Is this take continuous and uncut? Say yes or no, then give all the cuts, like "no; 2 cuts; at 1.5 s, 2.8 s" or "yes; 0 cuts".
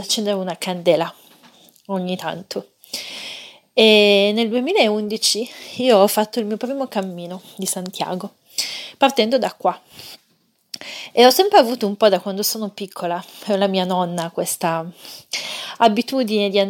yes; 0 cuts